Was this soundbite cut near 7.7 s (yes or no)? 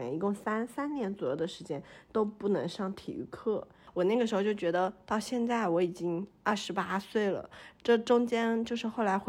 yes